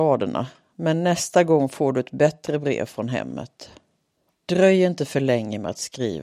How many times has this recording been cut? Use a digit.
1